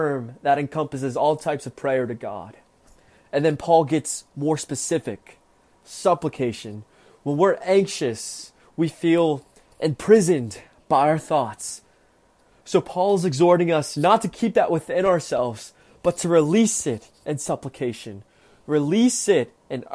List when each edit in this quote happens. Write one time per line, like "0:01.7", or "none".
none

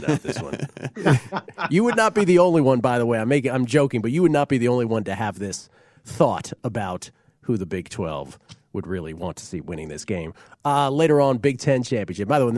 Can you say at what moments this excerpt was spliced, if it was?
none

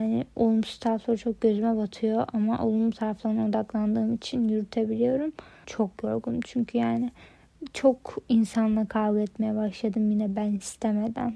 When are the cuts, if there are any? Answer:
0:05.6

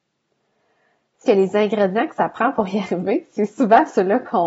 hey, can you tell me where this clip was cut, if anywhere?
0:01.2

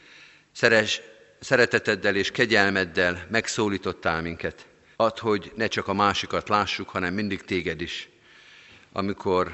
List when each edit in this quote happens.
0:04.9

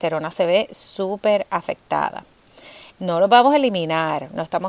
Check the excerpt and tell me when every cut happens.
0:03.0

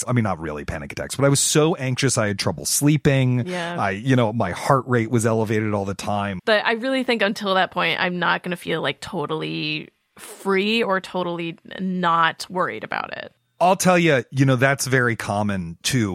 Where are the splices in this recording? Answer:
0:06.4

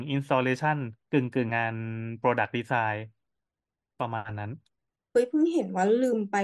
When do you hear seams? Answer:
0:01.5

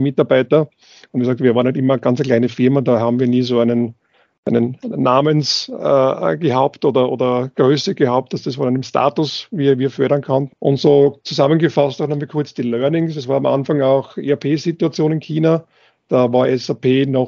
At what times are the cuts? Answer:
0:10.5

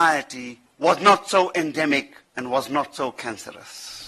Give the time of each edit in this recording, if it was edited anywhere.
0:02.2

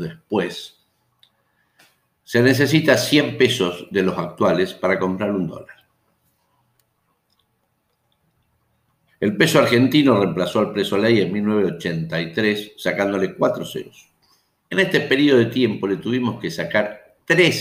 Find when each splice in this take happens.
0:09.1
0:14.6

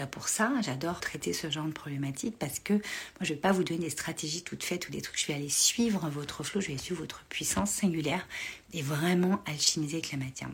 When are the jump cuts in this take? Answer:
0:01.0

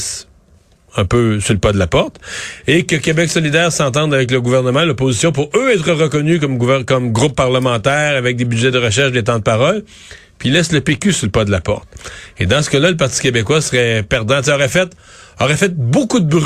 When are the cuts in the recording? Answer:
none

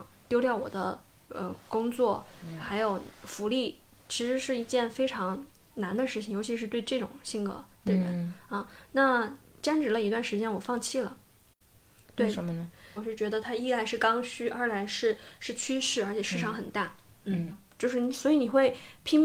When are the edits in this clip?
0:13.0
0:17.5

